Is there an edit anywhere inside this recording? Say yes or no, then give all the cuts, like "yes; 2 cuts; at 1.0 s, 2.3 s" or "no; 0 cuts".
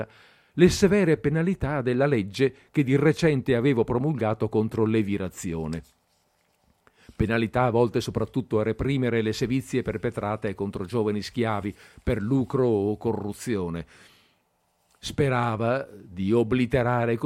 no; 0 cuts